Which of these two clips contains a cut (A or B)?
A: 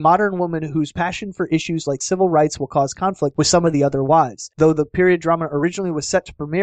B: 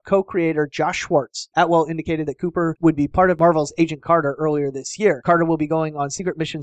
B